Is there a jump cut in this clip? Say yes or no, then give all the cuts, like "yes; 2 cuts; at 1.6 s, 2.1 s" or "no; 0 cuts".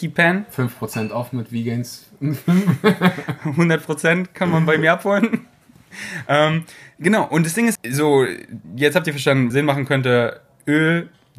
yes; 2 cuts; at 7.8 s, 9.5 s